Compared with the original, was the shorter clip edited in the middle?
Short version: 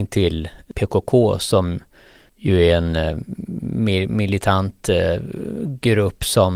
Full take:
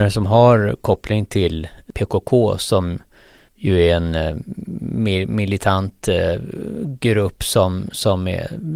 no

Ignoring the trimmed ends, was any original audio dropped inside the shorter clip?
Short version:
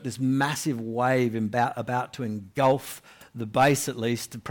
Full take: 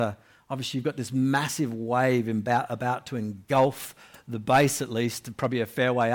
no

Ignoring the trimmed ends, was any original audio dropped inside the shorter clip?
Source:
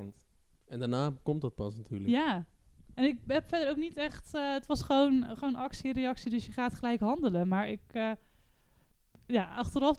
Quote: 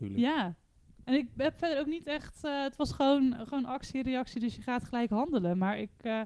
no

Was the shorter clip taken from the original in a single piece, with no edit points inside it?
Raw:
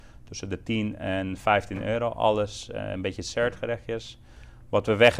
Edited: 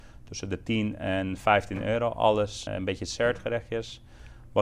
no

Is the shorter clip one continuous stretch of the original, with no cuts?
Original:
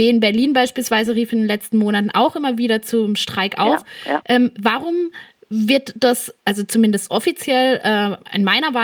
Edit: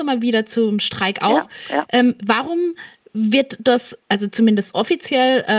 yes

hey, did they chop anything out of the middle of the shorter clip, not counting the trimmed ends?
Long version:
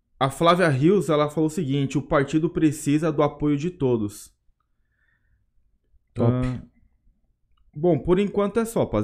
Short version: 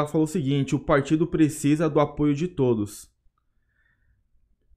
no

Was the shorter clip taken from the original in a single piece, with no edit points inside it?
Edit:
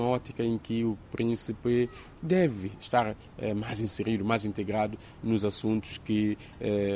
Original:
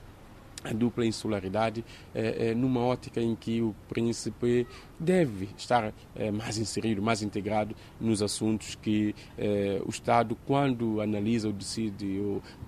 yes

